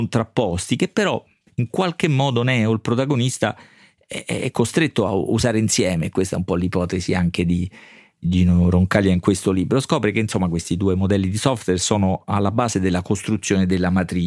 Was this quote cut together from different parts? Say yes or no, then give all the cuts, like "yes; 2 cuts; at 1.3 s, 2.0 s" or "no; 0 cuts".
no; 0 cuts